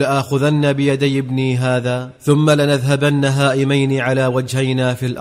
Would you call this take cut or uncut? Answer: cut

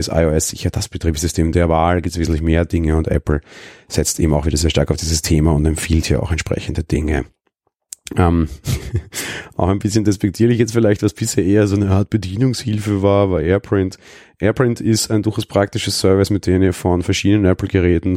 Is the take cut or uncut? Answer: uncut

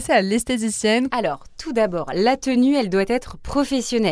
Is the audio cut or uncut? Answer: cut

